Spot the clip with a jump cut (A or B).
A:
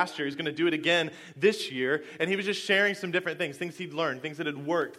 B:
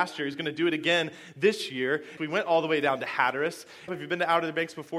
B